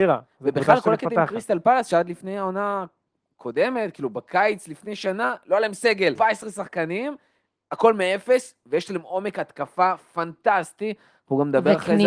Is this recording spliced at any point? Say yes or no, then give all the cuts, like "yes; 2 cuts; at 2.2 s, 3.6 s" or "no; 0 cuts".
yes; 1 cut; at 6.2 s